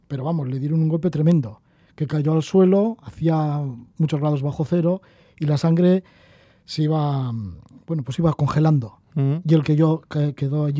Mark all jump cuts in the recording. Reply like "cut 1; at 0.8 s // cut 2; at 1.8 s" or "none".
cut 1; at 3.9 s

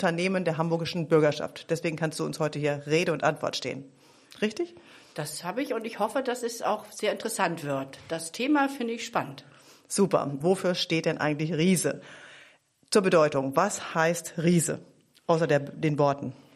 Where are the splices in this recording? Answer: cut 1; at 10.4 s

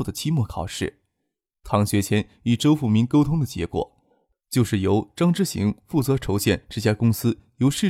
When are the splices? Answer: none

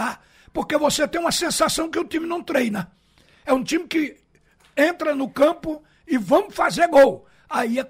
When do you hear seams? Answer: none

